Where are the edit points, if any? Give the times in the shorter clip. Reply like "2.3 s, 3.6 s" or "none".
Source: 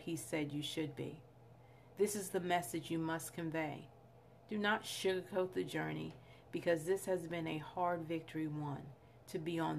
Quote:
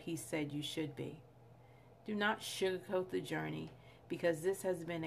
1.9 s